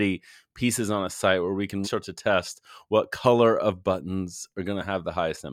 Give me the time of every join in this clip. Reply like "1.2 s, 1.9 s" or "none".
1.8 s